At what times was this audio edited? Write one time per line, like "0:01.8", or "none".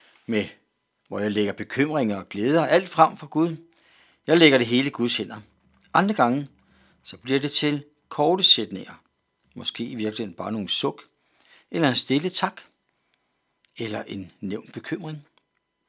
none